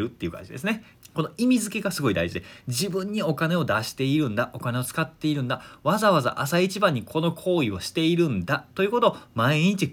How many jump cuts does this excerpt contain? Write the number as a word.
one